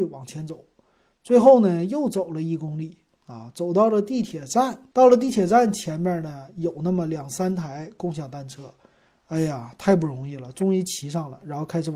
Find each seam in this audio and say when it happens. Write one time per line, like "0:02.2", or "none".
0:04.9